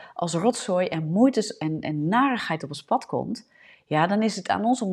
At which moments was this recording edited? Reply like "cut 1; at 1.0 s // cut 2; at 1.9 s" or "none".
none